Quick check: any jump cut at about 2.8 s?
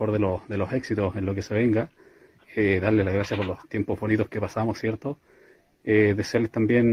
no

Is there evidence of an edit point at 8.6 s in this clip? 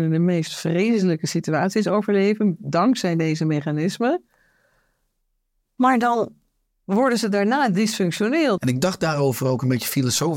yes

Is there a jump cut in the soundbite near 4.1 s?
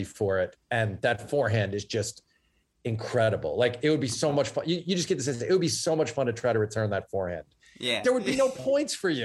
no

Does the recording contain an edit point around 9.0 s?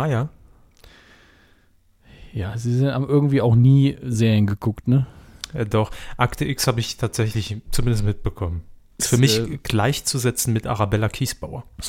yes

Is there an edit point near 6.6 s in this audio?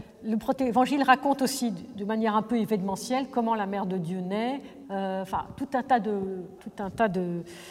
yes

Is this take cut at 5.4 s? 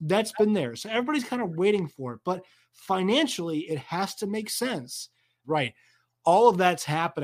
yes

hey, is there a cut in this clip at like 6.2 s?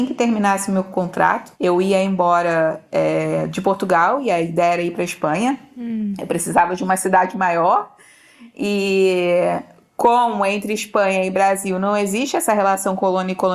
no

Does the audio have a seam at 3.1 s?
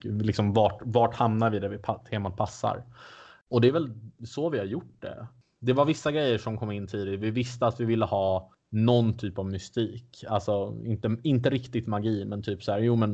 no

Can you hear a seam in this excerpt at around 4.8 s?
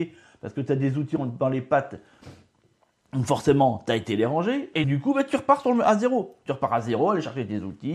yes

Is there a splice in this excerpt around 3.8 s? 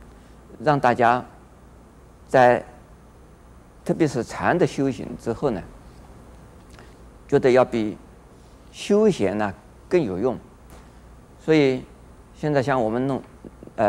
yes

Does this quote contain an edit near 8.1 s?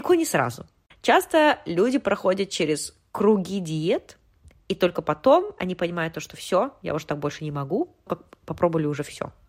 yes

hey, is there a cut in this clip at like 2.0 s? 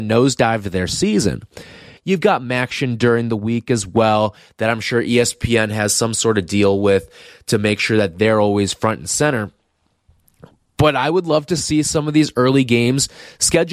yes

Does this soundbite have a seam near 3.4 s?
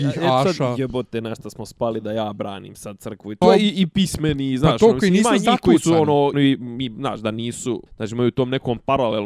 yes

